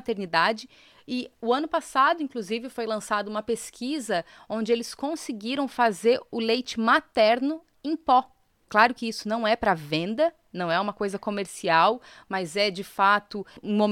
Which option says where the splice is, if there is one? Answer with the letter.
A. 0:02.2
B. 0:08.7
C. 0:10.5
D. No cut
B